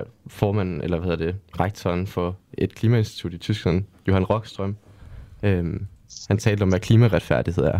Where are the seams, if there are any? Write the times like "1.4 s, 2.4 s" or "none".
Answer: none